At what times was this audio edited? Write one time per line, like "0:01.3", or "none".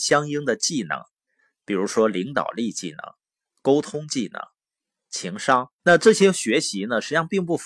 0:05.7